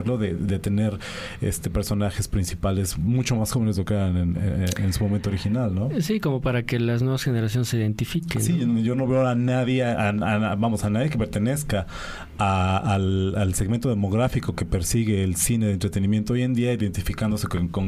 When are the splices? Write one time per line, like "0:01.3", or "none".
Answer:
none